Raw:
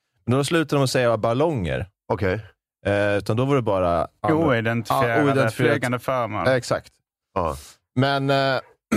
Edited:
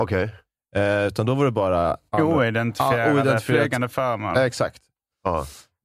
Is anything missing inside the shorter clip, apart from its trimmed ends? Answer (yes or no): no